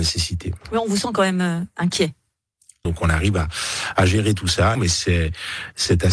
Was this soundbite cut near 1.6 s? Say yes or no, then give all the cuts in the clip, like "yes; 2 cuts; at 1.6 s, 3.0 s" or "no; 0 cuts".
no; 2 cuts; at 2.8 s, 4.7 s